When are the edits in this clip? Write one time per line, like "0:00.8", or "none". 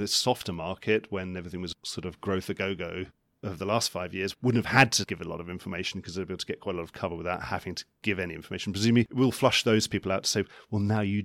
none